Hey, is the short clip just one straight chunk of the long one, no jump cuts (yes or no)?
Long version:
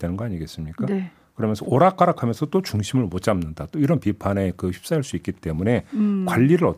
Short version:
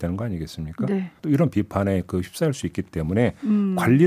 no